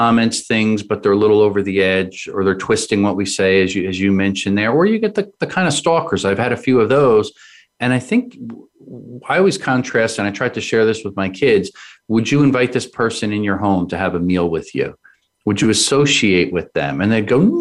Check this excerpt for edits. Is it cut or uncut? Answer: uncut